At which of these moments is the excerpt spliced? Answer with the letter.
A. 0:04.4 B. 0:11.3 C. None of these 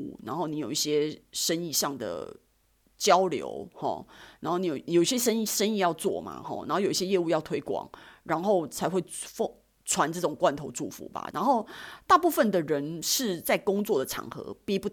B